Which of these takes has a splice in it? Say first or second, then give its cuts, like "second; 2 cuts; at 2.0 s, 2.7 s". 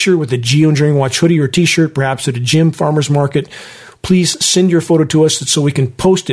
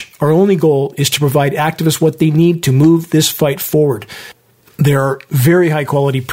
first; 1 cut; at 3.9 s